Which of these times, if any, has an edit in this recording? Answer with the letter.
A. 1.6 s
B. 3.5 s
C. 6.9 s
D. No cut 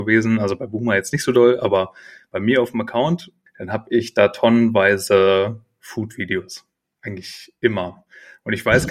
B